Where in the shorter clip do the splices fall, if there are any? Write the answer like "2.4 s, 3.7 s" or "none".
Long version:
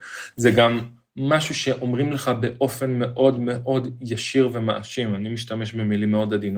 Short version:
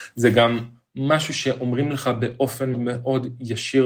2.7 s